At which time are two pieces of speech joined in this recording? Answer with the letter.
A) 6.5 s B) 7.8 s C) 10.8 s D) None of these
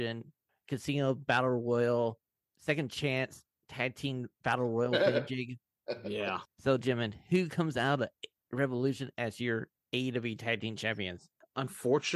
D